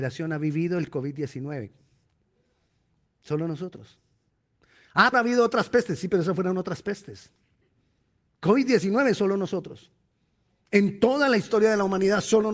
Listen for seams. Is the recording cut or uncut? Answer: cut